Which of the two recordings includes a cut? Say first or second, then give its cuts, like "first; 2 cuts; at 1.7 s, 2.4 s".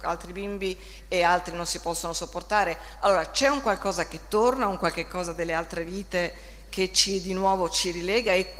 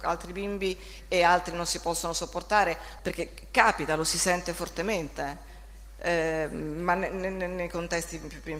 second; 1 cut; at 3.0 s